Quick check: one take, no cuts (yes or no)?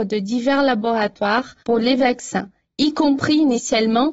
no